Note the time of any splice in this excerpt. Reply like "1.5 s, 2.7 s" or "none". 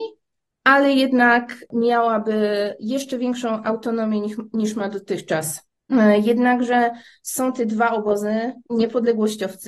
8.7 s